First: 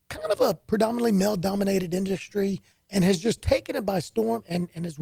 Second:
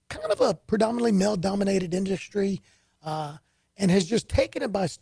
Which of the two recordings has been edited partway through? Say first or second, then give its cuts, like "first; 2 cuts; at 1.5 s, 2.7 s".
first; 1 cut; at 2.7 s